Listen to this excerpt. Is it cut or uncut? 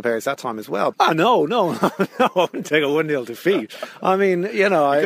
cut